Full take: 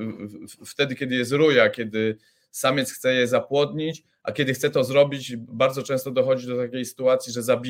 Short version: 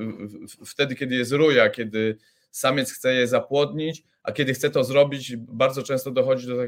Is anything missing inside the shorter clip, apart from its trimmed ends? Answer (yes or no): no